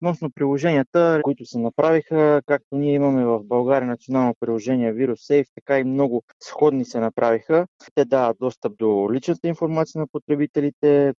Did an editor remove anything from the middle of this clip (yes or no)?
yes